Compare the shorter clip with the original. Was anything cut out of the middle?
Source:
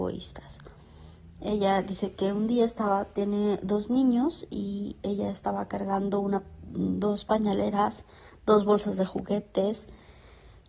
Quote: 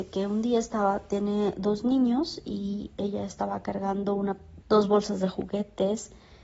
yes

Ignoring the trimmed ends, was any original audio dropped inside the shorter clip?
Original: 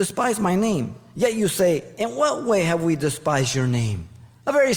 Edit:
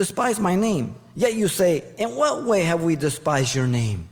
no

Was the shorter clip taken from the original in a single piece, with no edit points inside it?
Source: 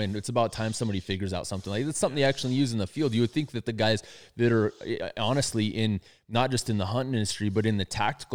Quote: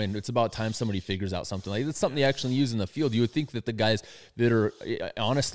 yes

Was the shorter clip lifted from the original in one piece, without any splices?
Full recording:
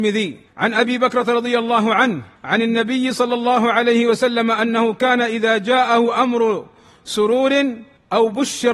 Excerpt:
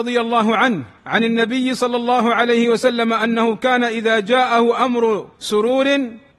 no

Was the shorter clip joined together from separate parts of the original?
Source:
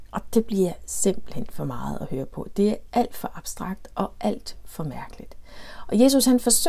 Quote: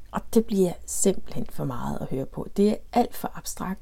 no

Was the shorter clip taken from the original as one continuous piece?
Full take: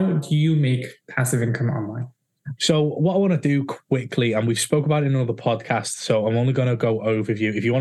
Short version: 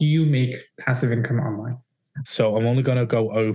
no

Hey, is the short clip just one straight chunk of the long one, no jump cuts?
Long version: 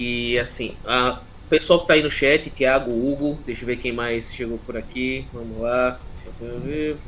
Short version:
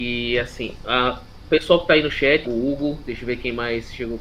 no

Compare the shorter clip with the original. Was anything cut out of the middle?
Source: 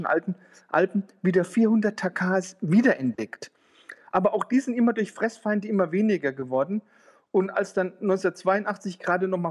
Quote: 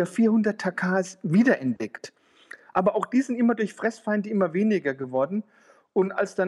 no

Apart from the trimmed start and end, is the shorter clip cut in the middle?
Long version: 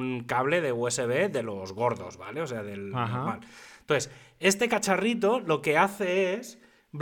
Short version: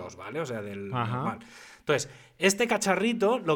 no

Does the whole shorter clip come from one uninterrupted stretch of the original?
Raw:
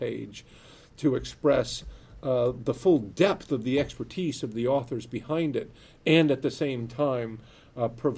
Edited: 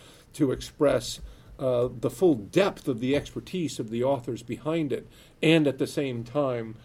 yes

